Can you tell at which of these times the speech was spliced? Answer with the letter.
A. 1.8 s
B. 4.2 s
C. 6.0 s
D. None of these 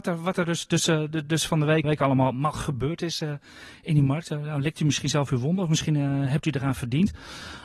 A